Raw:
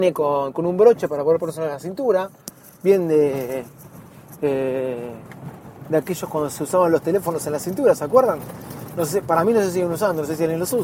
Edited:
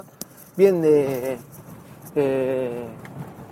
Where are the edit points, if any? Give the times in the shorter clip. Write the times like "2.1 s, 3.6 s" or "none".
none